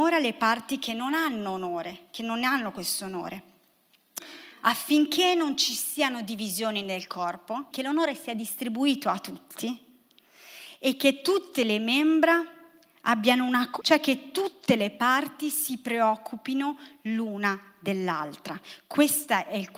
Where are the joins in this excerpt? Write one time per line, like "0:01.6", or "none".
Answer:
0:07.7
0:13.8